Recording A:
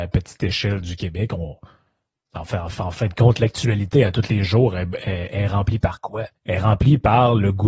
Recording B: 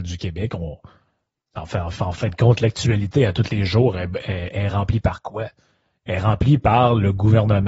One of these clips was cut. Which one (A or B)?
A